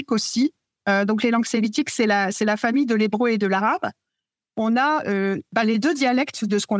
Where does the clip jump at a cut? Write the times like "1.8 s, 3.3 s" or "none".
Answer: none